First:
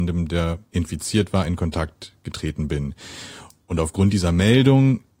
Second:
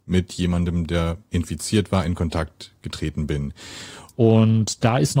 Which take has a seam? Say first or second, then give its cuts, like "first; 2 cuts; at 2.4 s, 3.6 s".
second; 1 cut; at 4.1 s